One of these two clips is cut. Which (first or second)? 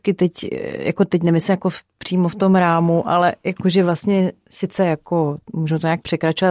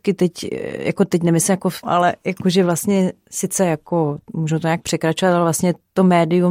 second